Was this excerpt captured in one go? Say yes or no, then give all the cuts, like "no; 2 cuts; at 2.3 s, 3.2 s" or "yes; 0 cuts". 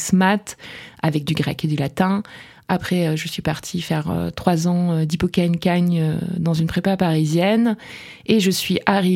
yes; 0 cuts